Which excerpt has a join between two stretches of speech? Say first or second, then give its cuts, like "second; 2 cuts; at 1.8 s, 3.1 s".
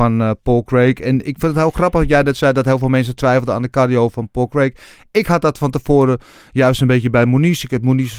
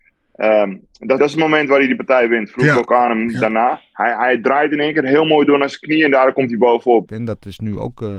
second; 2 cuts; at 1.2 s, 7.1 s